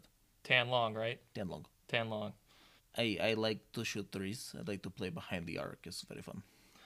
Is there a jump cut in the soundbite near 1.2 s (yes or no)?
no